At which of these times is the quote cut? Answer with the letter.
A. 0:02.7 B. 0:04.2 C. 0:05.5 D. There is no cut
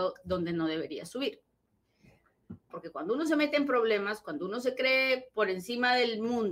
A